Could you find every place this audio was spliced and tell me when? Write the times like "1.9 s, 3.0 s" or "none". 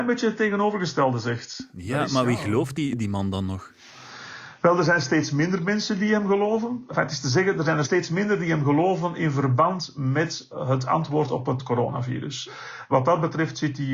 none

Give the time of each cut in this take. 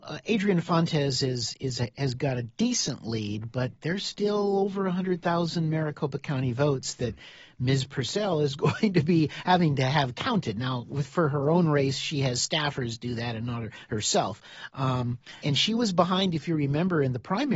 15.4 s

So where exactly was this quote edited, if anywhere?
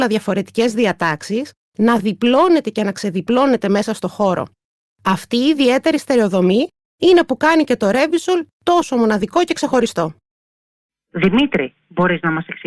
none

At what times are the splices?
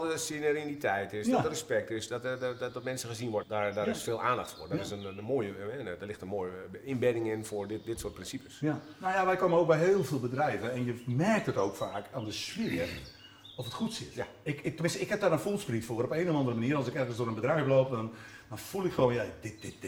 3.4 s

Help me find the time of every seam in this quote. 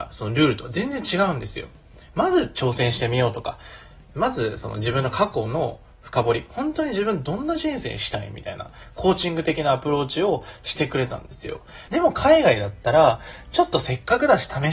11.9 s

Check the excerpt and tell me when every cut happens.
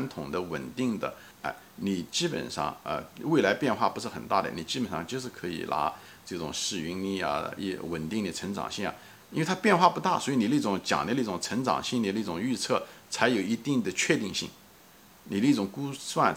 1.3 s

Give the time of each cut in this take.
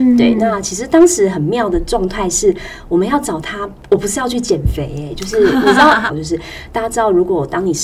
6.1 s

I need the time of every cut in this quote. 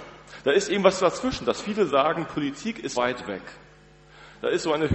2.9 s

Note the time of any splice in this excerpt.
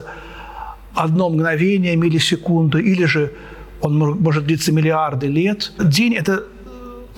none

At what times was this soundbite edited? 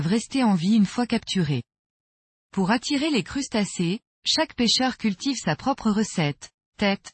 none

